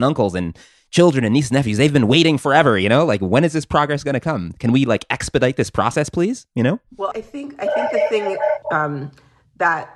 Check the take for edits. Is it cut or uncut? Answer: cut